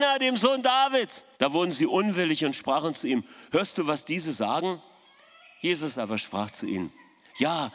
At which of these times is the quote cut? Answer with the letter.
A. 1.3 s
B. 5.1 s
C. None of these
A